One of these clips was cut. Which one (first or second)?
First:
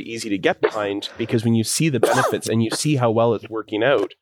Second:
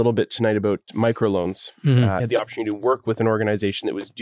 second